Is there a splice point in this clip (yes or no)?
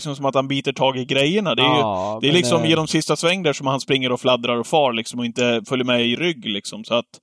no